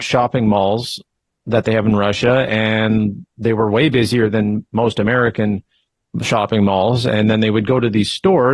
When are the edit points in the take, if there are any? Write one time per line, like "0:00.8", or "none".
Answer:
none